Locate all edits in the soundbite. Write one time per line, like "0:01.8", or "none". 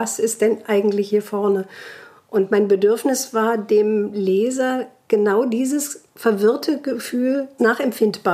none